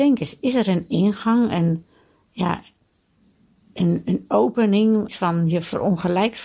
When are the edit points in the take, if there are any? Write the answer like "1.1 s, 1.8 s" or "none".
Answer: 5.1 s